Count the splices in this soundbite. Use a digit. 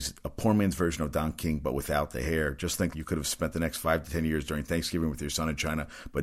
1